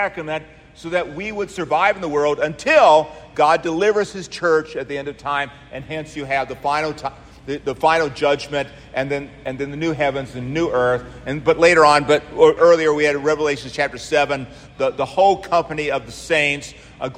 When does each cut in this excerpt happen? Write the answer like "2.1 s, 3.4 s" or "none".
12.6 s